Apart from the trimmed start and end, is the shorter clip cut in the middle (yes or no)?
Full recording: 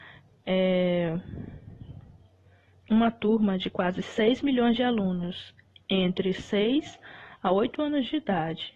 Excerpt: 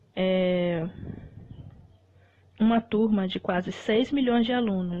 no